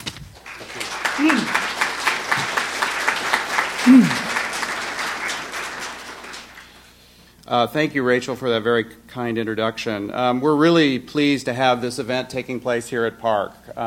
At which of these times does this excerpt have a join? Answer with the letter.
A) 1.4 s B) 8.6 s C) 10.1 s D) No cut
D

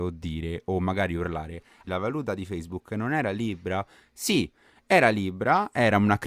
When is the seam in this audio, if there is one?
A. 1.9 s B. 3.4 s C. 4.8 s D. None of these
A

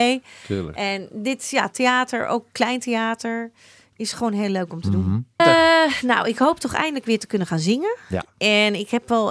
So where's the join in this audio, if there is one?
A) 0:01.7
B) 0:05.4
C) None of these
B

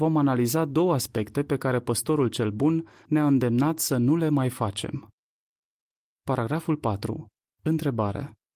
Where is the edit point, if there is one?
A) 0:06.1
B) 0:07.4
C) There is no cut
A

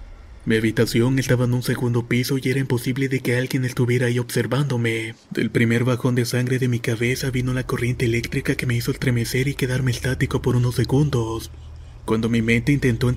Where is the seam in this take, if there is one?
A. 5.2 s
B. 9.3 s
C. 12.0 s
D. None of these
A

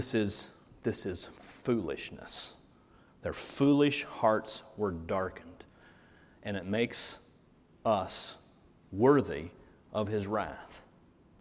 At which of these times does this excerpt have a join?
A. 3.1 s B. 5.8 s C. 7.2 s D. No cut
D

